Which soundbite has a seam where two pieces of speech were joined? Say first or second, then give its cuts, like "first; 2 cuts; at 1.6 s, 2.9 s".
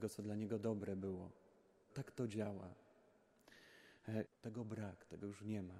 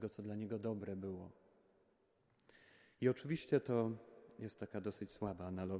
first; 2 cuts; at 1.9 s, 4.3 s